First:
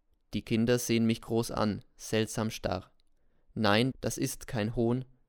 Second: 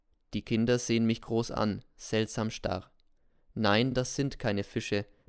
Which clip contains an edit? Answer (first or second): first